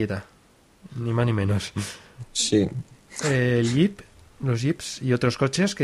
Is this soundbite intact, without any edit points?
yes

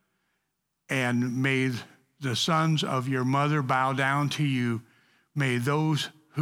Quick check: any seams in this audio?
no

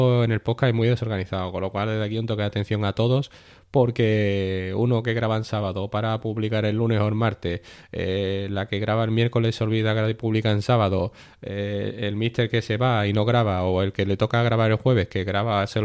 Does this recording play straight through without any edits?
yes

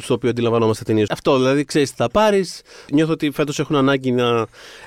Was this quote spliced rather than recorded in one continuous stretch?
yes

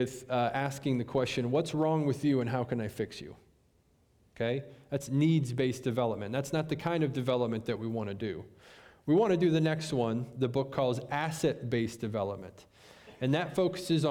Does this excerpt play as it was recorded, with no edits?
yes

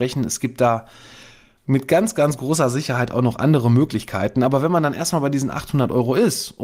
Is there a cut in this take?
no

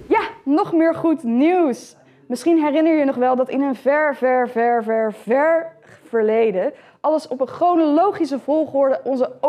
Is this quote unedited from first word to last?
yes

